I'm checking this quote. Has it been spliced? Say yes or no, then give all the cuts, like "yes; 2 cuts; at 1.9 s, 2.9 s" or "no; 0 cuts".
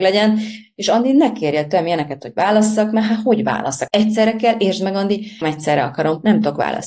yes; 2 cuts; at 3.9 s, 5.4 s